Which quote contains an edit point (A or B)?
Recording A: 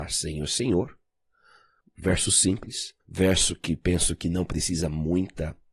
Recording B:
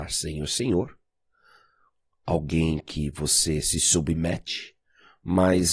A